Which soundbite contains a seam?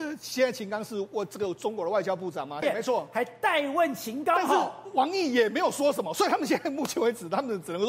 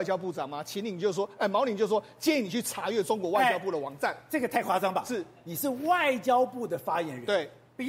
first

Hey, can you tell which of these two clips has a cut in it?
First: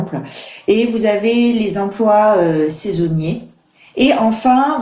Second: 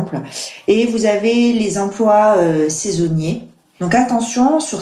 second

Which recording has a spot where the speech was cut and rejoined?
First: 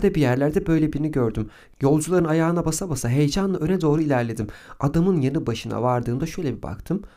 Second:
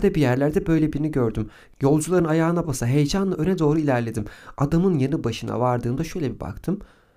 second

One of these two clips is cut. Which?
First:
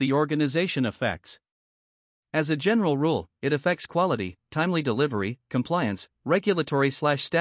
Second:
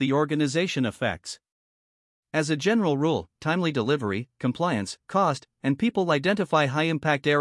second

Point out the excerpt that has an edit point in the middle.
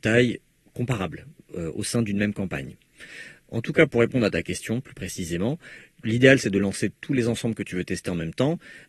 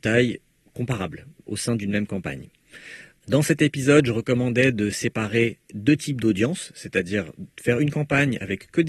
second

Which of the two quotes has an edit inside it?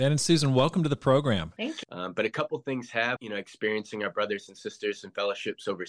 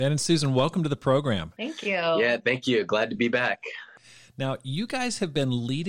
first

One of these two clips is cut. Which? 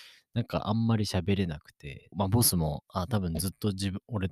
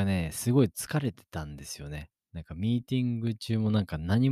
first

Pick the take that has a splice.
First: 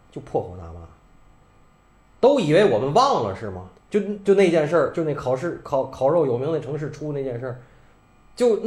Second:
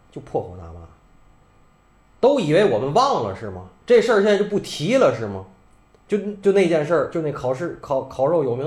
first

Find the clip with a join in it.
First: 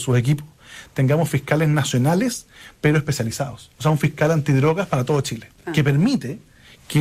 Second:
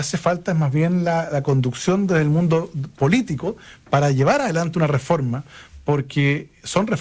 first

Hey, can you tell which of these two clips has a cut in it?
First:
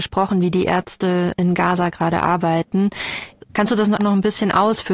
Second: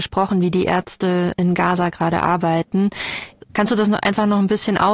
first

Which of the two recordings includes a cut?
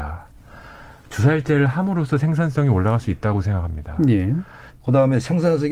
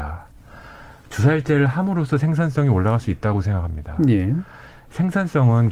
first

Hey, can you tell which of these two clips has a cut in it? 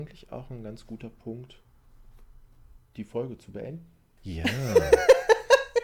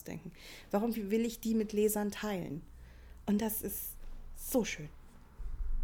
first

